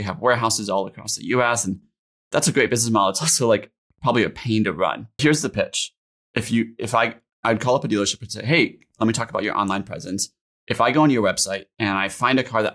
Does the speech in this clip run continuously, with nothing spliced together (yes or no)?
no